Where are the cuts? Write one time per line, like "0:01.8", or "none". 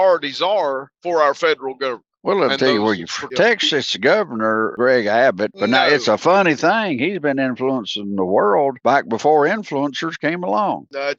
0:03.3
0:05.5

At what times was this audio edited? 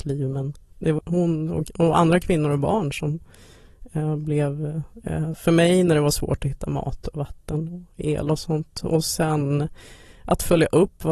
0:01.0
0:05.3

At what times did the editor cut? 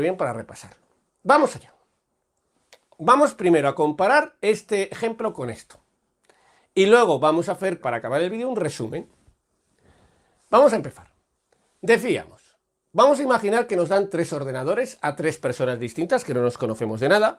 0:07.8

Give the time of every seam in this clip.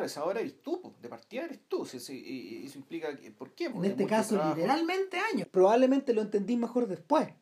0:03.7
0:05.4

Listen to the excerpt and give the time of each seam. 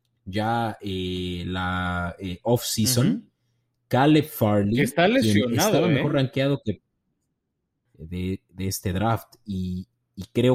0:07.9

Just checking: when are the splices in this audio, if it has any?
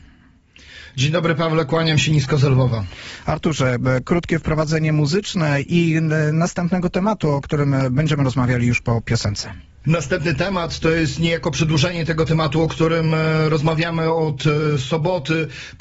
none

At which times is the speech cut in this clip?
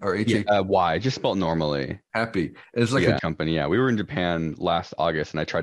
0:03.2

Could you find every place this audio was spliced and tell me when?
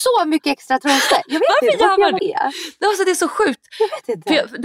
0:02.2

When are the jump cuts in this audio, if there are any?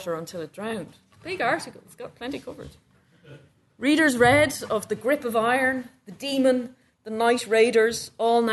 none

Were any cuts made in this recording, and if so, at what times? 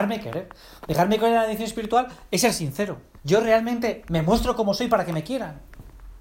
0:03.2

